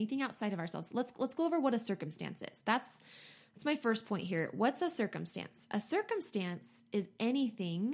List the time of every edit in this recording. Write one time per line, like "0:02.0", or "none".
none